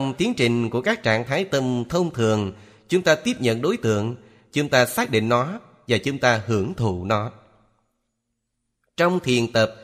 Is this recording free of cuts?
yes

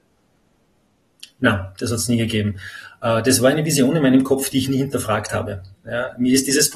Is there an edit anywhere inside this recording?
no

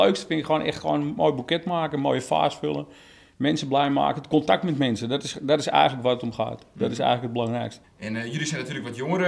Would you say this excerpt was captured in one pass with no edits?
no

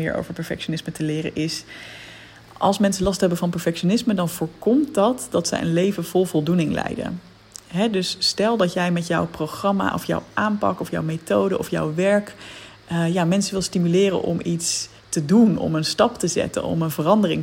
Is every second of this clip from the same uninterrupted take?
no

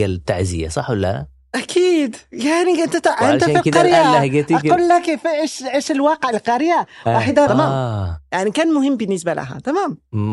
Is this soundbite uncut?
no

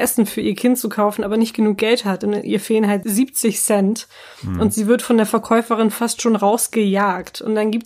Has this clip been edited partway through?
no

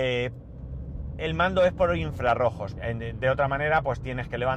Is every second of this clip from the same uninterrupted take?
no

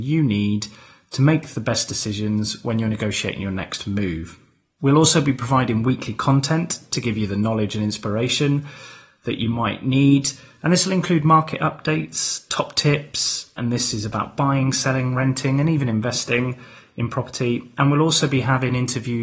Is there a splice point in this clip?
no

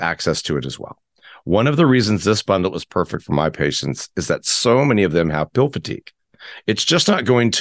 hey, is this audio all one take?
yes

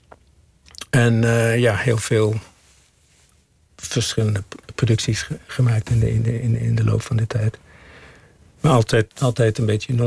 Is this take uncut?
no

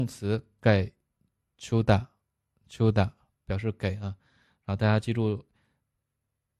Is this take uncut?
yes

